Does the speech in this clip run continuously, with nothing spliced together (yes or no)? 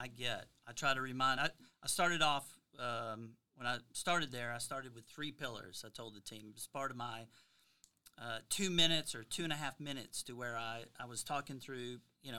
yes